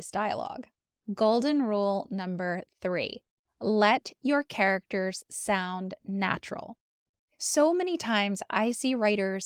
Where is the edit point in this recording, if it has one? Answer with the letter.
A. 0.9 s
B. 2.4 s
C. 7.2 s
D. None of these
C